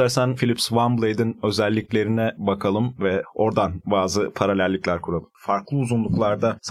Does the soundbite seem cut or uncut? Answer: cut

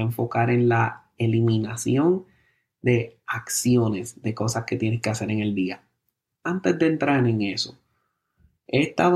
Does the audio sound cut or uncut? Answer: uncut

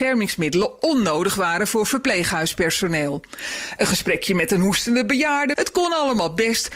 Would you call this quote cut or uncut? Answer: cut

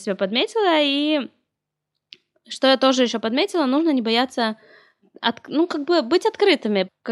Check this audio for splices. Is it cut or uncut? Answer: uncut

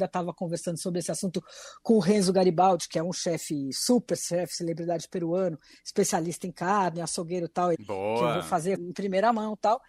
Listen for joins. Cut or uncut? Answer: cut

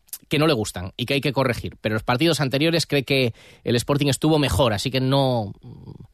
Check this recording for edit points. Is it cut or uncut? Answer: uncut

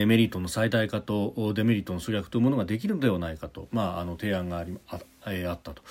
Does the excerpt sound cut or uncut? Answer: uncut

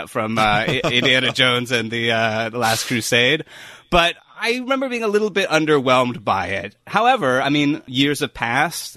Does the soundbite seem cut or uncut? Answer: uncut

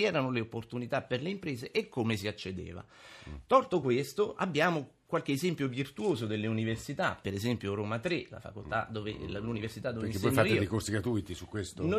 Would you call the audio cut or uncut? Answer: uncut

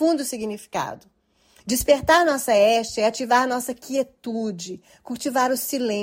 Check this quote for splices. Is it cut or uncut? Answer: uncut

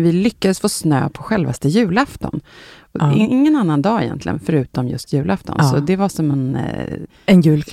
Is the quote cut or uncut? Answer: uncut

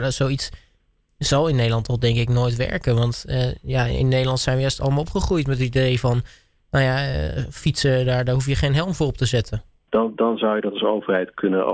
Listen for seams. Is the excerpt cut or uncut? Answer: cut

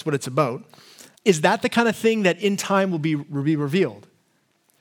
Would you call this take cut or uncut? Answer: cut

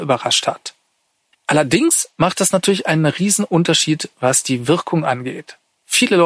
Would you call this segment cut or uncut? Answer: cut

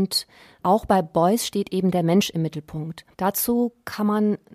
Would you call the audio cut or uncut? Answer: cut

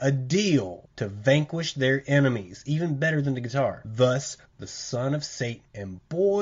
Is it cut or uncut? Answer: cut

